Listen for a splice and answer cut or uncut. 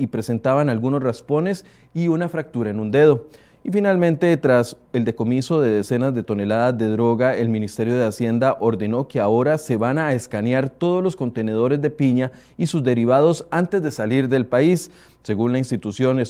uncut